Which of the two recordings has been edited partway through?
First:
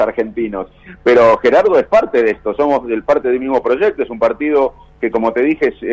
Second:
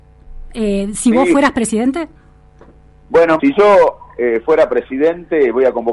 second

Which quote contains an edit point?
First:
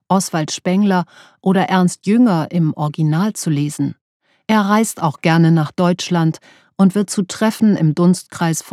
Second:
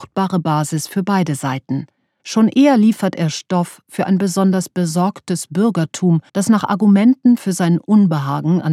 second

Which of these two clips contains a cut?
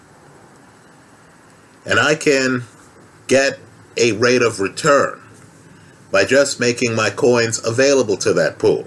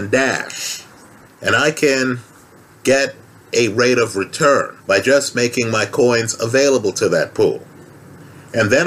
second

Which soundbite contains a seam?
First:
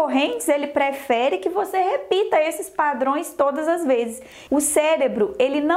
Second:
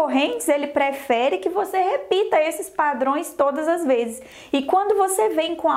first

